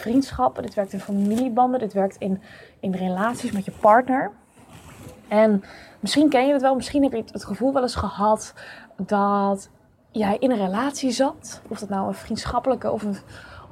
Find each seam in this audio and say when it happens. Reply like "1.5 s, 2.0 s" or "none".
none